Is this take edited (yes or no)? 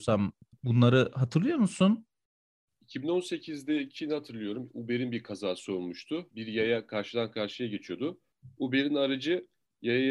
yes